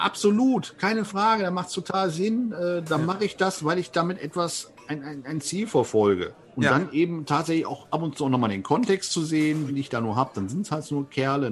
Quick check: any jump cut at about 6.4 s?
yes; 2 cuts; at 6.4 s, 9.7 s

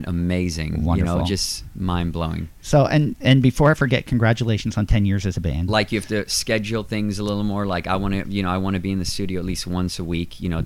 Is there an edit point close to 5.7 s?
yes; 1 cut; at 5.7 s

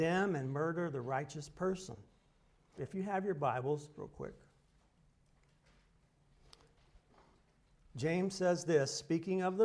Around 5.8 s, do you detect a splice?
no; 2 cuts; at 2.8 s, 3.9 s

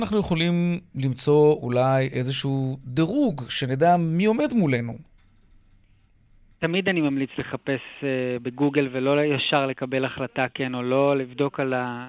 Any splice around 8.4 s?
no; 0 cuts

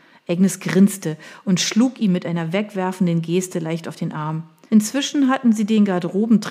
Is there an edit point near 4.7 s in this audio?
yes; 1 cut; at 4.7 s

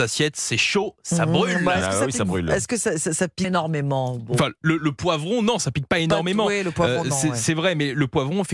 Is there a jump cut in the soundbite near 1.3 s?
no; 1 cut; at 3.4 s

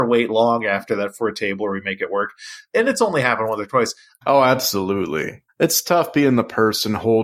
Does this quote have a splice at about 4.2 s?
yes; 2 cuts; at 4.2 s, 5.5 s

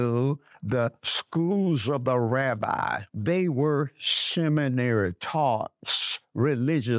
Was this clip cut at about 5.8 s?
no; 1 cut; at 3.1 s

